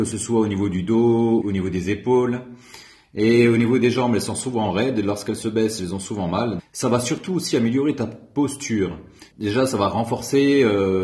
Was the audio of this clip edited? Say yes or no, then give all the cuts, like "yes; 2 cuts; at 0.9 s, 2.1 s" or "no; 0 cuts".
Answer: yes; 3 cuts; at 1.4 s, 6.6 s, 9.3 s